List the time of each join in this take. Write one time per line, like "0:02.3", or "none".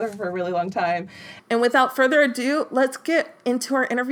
0:01.4